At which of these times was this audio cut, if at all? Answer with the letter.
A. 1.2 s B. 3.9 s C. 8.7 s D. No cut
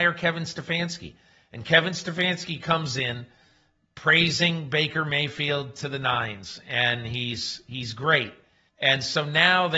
C